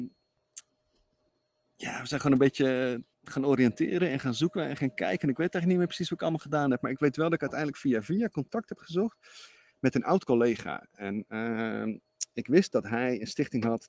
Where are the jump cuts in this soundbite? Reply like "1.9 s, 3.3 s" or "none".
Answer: 3.1 s

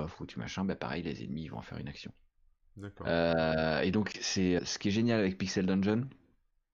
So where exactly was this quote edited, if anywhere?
4.6 s

